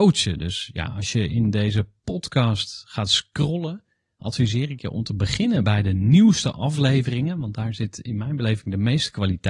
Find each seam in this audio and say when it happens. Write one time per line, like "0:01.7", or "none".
none

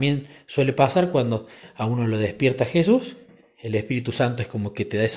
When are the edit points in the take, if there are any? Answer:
none

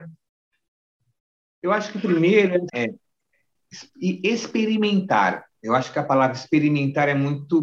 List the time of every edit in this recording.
0:02.7

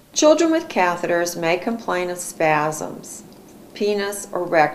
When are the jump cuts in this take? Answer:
0:03.7

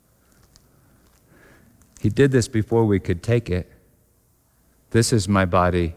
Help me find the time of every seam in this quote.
0:04.8

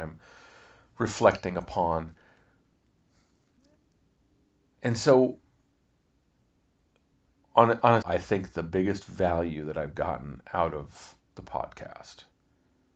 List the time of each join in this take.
0:08.0

